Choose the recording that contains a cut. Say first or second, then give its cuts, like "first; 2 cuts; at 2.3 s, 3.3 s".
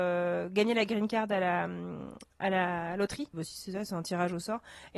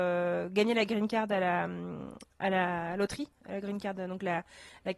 first; 1 cut; at 3.3 s